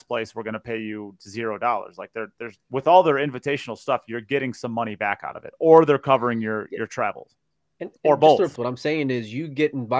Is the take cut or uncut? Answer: cut